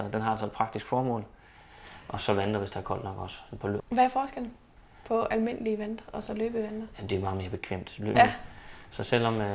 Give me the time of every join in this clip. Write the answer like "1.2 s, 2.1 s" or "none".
3.8 s, 8.1 s